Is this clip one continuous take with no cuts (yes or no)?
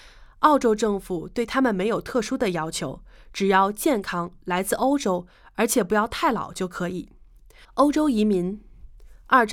no